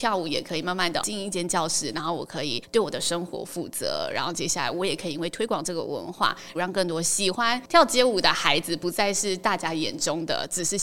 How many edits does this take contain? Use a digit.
1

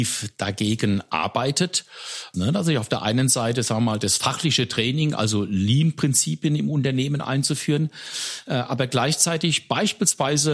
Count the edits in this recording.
1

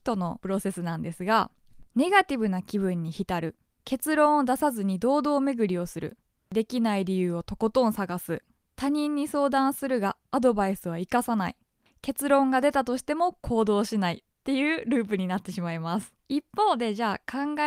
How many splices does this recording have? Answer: 1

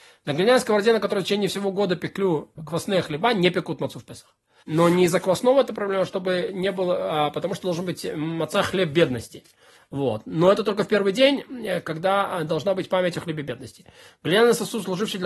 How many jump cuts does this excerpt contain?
1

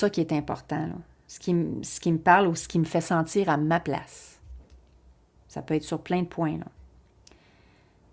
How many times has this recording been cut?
1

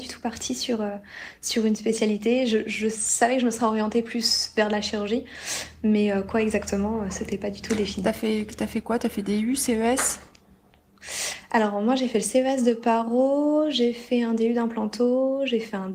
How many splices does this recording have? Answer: 0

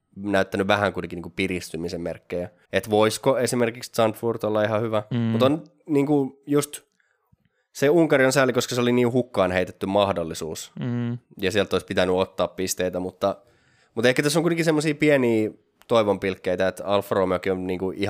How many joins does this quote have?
2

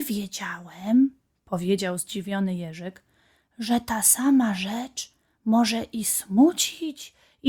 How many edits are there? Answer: 0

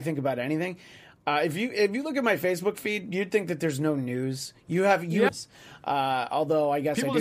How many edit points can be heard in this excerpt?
1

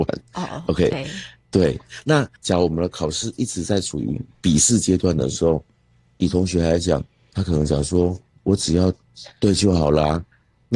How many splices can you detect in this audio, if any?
1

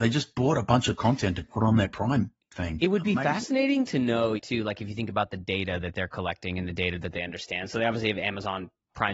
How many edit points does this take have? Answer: 1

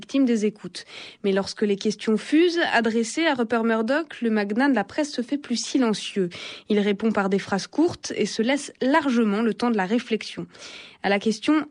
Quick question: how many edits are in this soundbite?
0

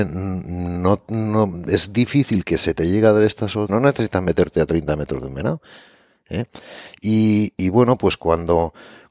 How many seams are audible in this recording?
1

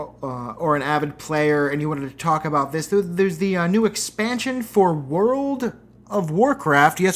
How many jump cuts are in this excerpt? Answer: 0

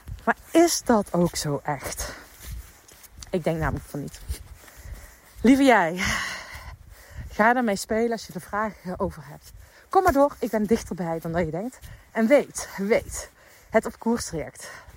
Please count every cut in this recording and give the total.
0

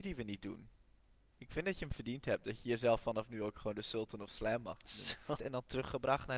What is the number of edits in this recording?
1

